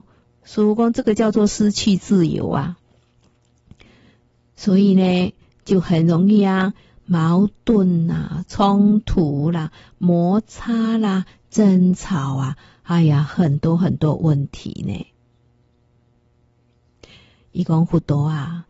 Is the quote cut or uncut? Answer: uncut